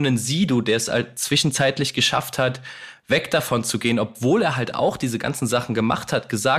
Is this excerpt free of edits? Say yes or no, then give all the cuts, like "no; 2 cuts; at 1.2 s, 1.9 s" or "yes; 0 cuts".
yes; 0 cuts